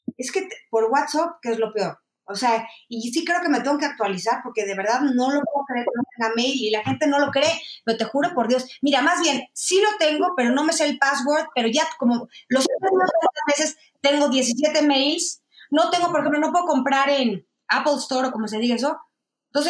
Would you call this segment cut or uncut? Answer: uncut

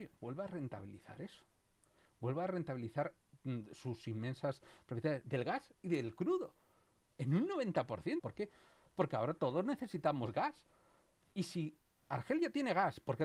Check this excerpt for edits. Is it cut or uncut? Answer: cut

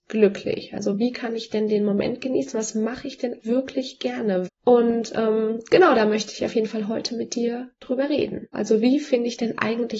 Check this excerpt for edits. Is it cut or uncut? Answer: cut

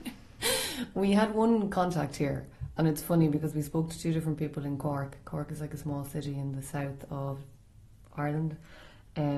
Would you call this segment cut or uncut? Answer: uncut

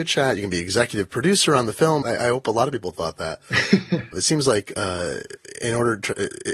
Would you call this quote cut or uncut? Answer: cut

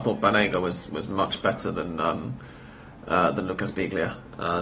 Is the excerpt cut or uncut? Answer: uncut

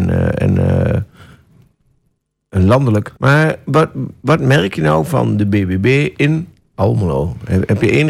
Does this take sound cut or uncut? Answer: cut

